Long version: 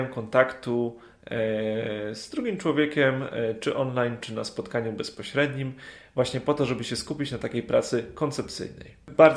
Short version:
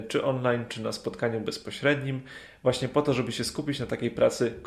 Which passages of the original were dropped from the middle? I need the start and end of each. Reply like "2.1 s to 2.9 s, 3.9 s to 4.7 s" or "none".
none